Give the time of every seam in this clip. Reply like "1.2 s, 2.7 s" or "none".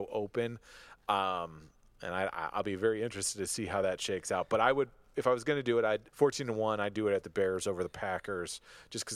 6.1 s

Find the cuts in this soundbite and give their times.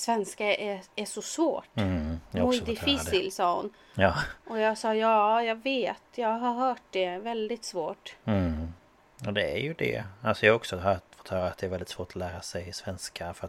none

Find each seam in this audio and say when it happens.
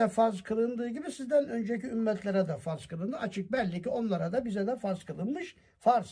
none

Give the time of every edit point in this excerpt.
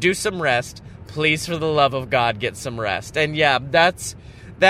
1.0 s

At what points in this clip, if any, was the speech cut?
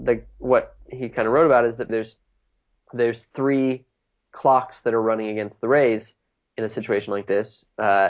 1.9 s

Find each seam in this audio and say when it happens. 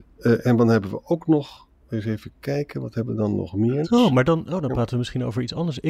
3.8 s

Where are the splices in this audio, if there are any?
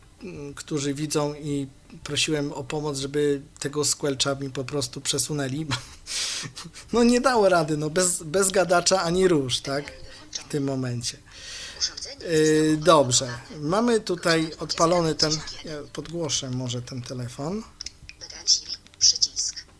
none

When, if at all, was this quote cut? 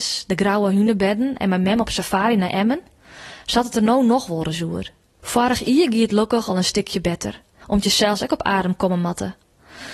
5.2 s, 7.6 s

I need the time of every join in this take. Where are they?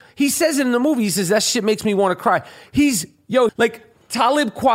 3.5 s

